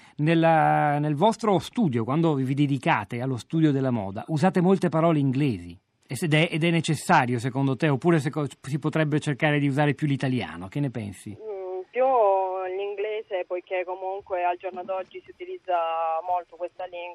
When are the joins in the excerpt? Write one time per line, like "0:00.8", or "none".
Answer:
0:06.0